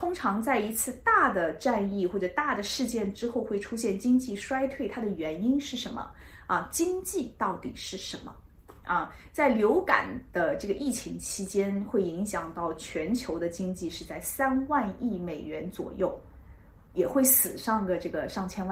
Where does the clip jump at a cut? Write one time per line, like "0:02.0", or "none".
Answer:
none

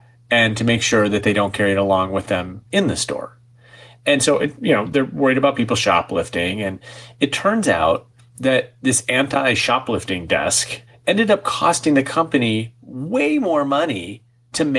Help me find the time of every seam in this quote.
0:10.9

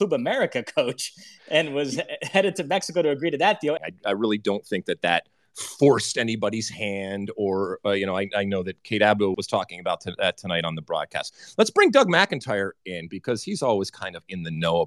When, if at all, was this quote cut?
0:03.8
0:09.3

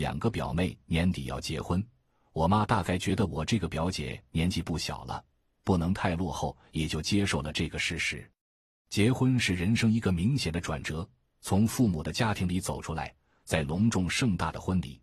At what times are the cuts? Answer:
0:13.4

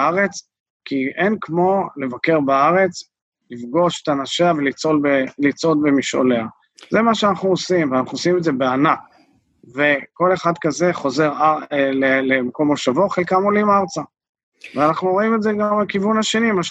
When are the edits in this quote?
none

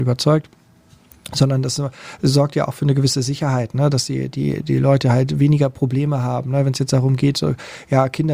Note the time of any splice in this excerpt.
none

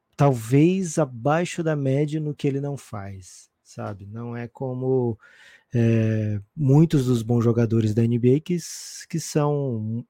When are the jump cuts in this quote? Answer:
none

